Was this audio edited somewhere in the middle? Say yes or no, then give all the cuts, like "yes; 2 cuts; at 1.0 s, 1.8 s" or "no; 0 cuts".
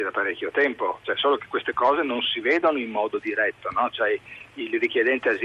no; 0 cuts